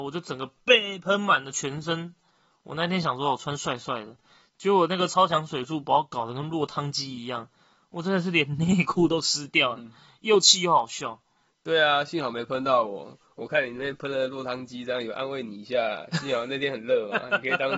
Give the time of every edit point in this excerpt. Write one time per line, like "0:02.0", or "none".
none